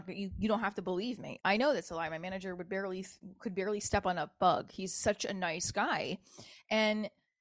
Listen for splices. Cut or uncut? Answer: uncut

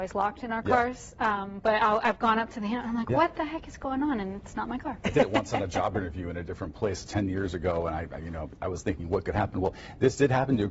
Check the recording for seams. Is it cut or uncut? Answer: uncut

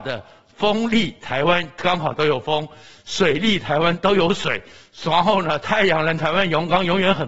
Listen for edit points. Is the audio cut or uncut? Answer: uncut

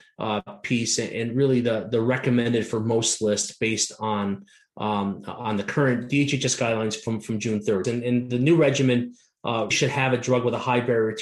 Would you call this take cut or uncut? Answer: cut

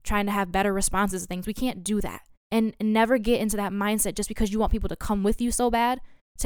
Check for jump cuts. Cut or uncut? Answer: cut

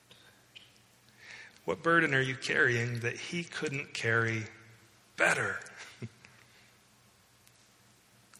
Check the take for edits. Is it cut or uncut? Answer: cut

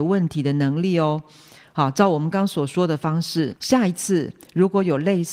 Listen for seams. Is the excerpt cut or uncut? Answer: cut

